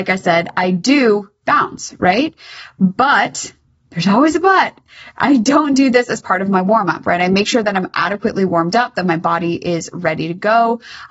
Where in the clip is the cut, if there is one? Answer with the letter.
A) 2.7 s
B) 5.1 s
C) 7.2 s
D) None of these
D